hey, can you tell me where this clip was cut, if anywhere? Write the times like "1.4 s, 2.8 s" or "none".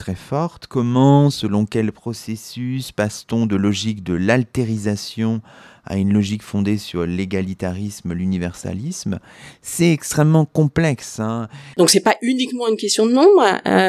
11.7 s